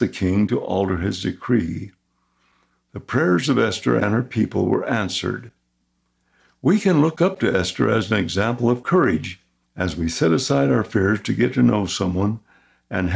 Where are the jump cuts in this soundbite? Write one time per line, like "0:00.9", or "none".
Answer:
0:09.6